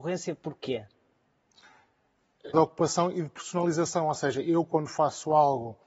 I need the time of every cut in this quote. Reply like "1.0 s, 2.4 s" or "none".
2.5 s